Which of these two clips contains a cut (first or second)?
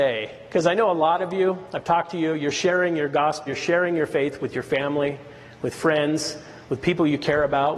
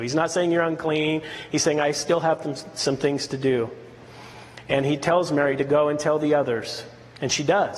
first